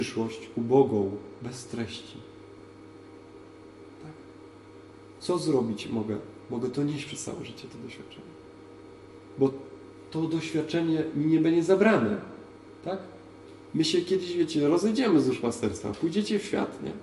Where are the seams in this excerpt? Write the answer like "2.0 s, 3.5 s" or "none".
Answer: 5.2 s